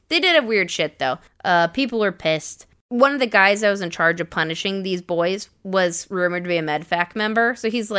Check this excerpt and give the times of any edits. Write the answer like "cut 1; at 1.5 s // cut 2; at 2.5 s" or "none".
cut 1; at 1.3 s // cut 2; at 2.7 s